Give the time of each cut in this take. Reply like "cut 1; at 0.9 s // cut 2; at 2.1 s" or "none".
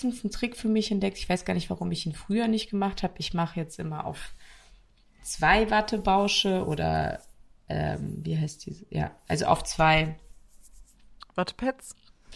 none